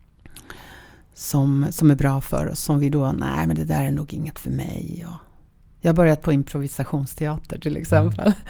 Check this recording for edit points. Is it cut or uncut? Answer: uncut